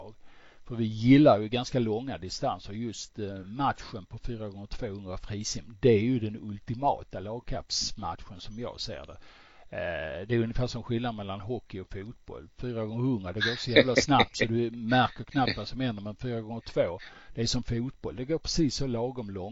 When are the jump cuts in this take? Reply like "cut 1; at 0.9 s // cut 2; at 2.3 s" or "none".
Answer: none